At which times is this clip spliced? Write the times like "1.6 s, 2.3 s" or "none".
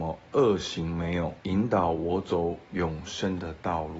1.4 s